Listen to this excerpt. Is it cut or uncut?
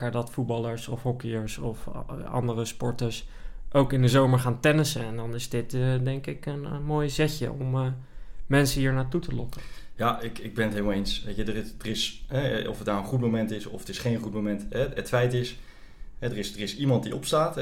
uncut